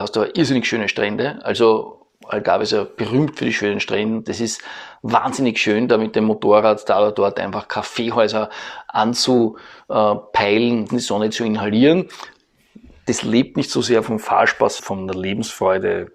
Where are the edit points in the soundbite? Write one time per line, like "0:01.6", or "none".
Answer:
0:10.9
0:14.8